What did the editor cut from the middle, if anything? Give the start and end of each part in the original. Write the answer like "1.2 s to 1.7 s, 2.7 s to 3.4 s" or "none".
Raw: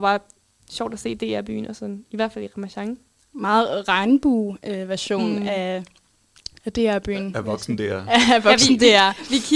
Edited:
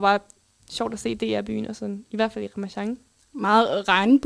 none